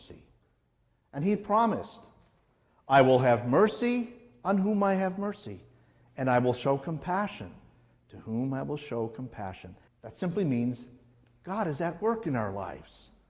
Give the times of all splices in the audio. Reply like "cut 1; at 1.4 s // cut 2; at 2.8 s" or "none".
cut 1; at 9.9 s